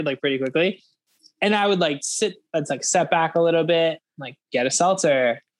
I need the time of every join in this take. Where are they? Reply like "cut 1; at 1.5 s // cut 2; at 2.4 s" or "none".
cut 1; at 4.4 s